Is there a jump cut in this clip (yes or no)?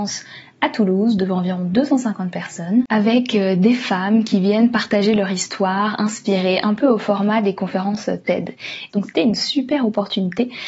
yes